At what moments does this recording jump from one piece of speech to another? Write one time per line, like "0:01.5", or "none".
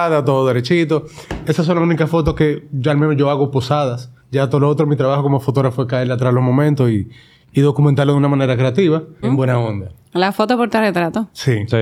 0:04.2
0:09.2